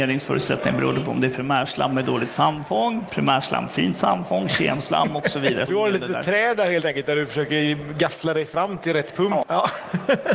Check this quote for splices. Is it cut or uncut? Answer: cut